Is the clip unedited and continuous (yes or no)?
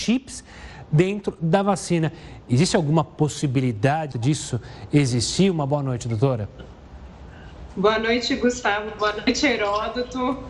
no